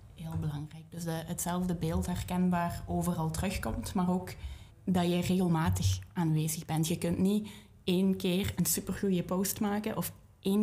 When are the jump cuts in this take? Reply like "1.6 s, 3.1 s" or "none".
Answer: 4.7 s